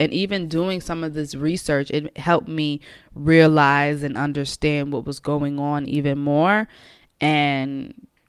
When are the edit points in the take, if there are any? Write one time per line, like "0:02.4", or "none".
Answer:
none